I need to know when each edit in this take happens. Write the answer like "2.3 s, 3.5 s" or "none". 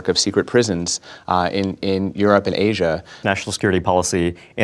3.2 s

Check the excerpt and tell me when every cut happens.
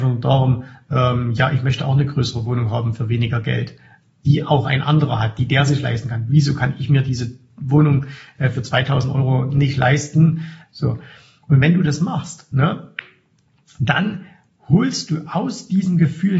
10.6 s

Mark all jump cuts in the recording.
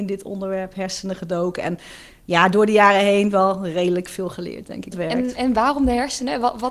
4.9 s

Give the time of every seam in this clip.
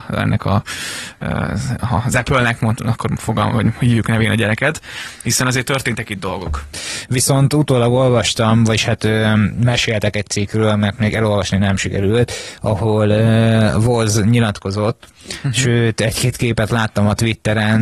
6.7 s

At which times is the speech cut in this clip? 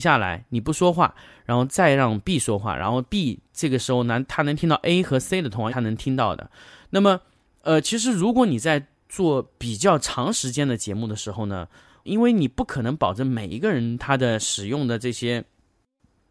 5.7 s, 12.1 s

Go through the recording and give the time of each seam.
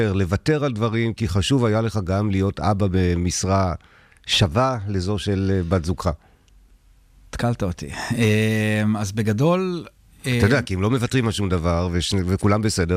none

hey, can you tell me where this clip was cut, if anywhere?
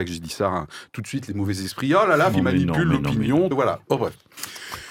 2.3 s, 3.5 s

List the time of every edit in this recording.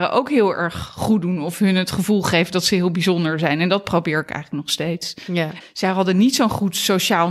5.6 s

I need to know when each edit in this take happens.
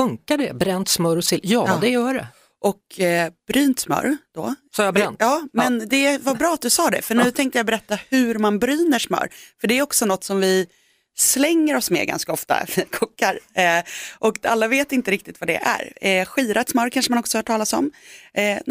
none

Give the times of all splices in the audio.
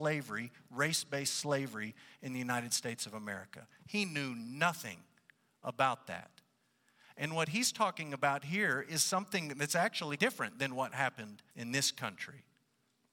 10.2 s, 11.5 s

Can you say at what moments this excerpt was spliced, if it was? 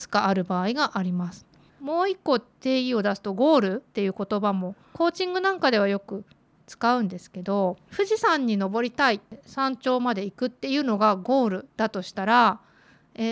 1.7 s, 3.9 s, 11.7 s

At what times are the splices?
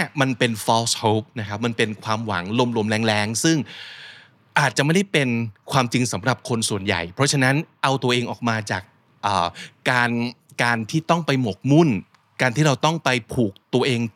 none

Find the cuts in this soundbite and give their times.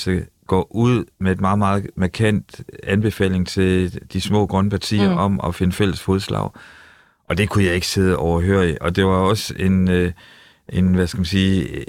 none

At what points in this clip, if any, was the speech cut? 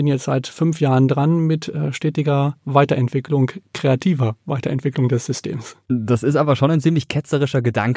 none

